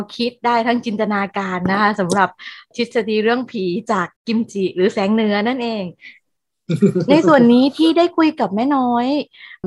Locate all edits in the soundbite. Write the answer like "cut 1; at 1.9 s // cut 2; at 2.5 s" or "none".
cut 1; at 4.2 s